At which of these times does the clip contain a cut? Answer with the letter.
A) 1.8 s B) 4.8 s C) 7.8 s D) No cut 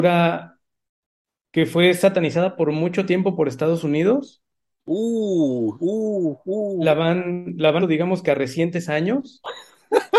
C